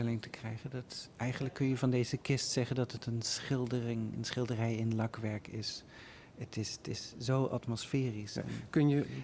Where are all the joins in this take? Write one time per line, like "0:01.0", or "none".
none